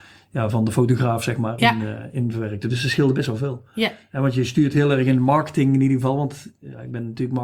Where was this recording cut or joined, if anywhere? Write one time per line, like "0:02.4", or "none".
0:01.6

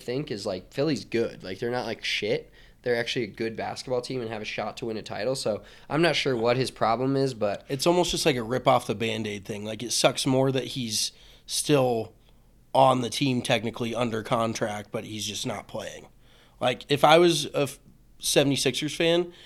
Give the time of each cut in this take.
none

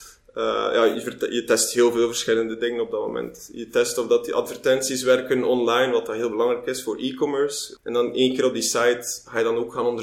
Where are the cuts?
0:07.8

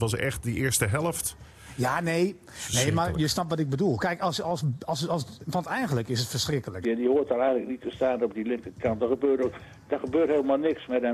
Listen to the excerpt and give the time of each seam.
0:06.8

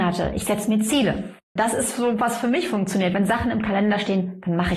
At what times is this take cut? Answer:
0:01.6

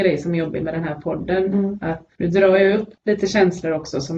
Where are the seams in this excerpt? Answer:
0:02.1

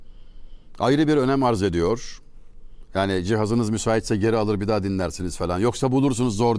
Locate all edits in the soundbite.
0:02.9

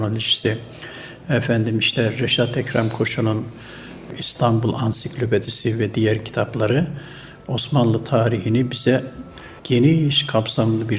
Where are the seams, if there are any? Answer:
0:09.6

